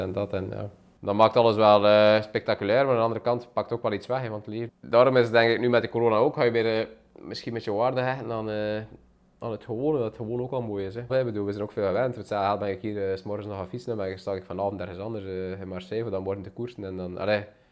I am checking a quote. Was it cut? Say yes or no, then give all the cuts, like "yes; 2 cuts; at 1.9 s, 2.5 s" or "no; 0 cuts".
yes; 2 cuts; at 4.7 s, 11.1 s